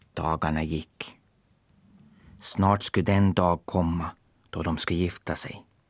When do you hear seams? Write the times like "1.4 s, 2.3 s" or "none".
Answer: none